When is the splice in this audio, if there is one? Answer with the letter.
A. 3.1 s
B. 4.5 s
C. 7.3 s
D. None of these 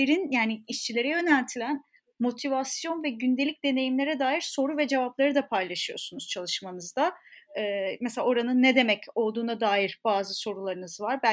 D